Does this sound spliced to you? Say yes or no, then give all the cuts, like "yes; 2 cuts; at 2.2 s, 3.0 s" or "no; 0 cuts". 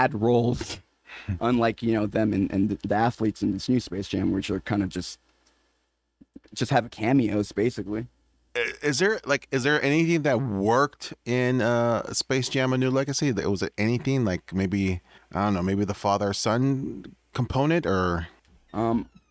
no; 0 cuts